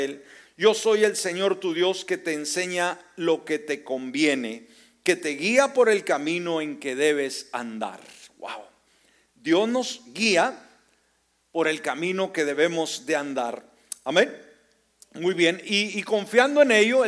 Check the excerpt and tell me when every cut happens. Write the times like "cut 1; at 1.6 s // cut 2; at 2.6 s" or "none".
none